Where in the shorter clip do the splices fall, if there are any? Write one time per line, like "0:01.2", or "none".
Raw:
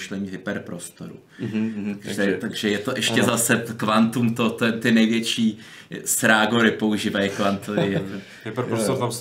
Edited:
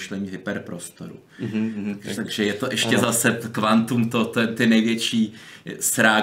0:02.2